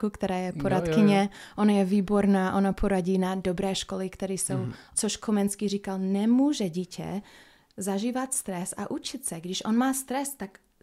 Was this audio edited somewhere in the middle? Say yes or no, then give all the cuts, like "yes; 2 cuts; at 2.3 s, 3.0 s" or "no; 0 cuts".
yes; 1 cut; at 4.9 s